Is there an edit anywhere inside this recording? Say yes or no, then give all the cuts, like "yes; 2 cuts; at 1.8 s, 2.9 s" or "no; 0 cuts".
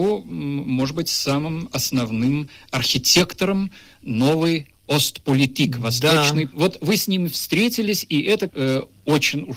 yes; 2 cuts; at 6.5 s, 8.5 s